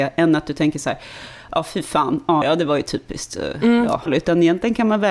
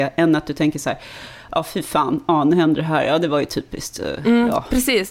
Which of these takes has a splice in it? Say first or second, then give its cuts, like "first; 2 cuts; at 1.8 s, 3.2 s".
first; 2 cuts; at 2.4 s, 4.1 s